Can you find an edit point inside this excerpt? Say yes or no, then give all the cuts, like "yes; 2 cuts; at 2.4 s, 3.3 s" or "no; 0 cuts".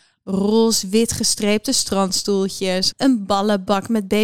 yes; 1 cut; at 2.9 s